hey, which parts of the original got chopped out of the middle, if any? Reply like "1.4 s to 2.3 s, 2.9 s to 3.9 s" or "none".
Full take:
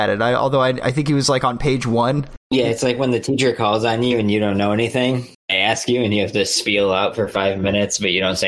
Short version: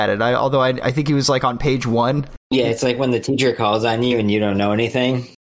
none